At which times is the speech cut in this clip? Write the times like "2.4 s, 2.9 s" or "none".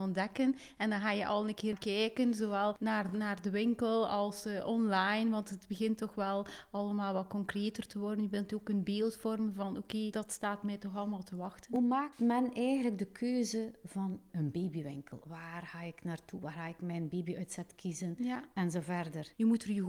none